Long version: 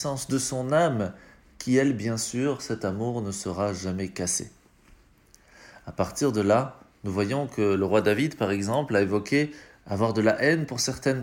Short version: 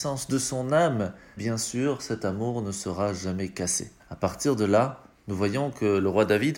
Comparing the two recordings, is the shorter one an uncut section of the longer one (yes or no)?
no